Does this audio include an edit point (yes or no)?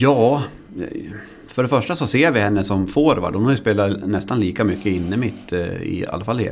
no